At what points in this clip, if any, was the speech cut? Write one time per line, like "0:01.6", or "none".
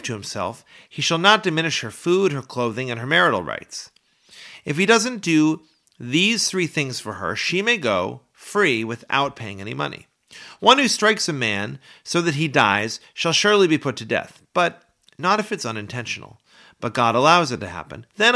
none